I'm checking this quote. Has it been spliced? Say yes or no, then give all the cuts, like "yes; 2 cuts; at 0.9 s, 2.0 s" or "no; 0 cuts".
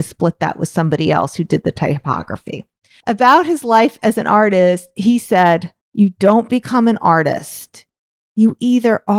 yes; 2 cuts; at 3.0 s, 5.8 s